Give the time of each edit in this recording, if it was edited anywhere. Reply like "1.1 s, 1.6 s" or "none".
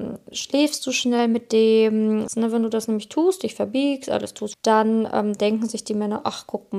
2.3 s, 4.5 s